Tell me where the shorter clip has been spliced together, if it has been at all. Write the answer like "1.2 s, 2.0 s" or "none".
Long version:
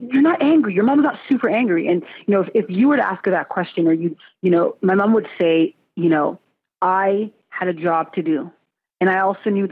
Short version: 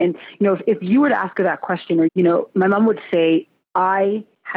2.1 s, 3.6 s